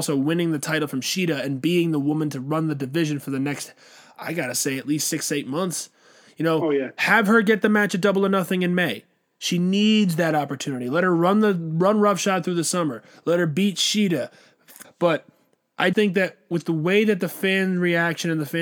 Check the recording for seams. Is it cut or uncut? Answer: cut